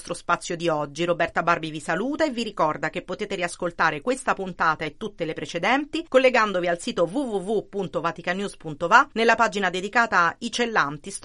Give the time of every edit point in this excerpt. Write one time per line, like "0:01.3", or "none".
none